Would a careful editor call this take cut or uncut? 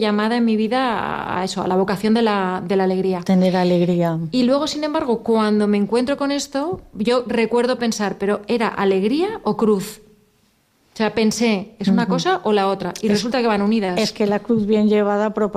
uncut